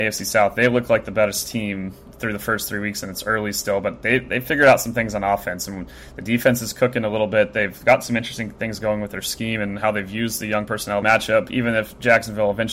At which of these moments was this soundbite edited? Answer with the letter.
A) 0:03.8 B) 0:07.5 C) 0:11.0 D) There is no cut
C